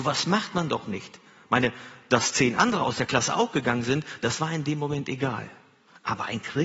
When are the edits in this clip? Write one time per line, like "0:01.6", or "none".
none